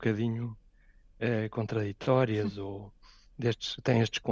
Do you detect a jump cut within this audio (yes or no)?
no